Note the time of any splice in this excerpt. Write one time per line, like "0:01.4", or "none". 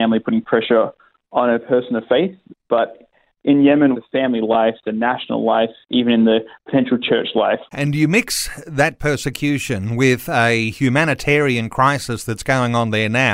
0:03.9
0:07.7